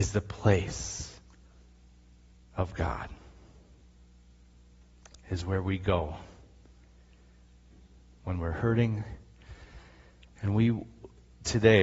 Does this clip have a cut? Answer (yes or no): no